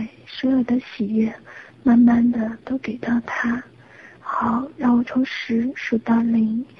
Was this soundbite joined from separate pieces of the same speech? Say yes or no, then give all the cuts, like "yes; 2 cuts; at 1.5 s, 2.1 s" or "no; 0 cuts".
no; 0 cuts